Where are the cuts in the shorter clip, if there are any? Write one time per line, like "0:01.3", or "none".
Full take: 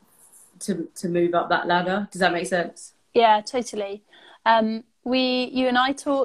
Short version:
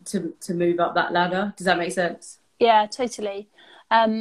none